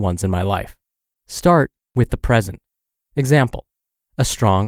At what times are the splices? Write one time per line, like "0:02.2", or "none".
0:01.2
0:03.0